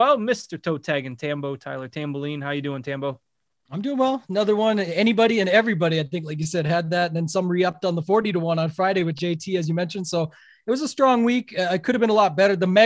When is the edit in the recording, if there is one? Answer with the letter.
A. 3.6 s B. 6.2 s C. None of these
C